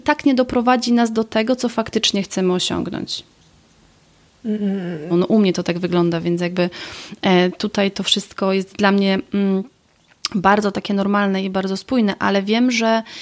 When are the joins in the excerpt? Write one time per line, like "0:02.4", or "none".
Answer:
0:05.1

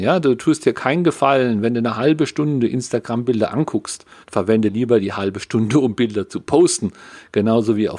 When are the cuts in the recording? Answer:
0:04.2

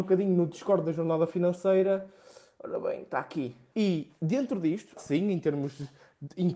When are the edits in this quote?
0:03.7
0:05.0

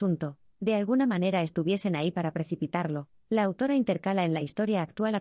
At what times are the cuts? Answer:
none

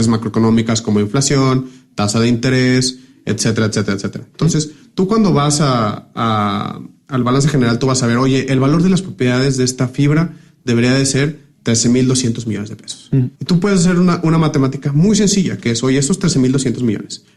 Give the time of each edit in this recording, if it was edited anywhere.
0:13.3

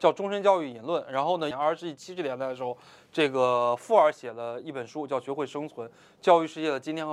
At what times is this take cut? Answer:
0:01.5

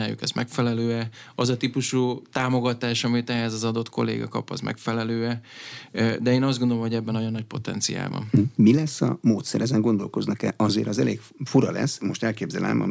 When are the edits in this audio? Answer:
none

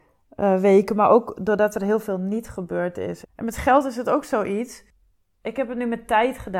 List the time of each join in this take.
0:03.2

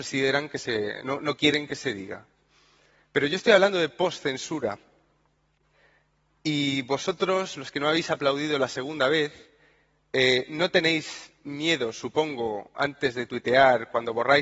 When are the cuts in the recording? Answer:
none

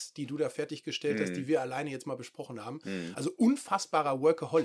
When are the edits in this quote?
none

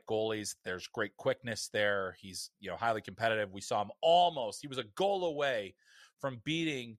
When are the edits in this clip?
none

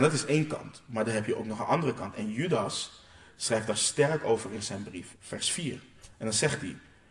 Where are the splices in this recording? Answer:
0:05.1

